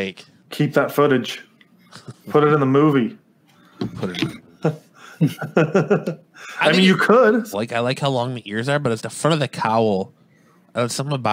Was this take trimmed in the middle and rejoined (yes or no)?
yes